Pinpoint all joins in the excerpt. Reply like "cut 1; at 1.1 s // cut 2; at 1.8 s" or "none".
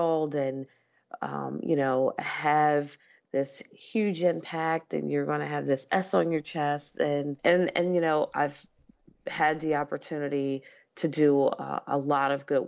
cut 1; at 7.4 s